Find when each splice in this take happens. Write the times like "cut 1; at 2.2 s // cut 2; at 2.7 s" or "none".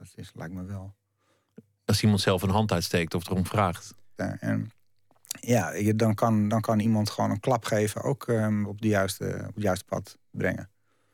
cut 1; at 4.2 s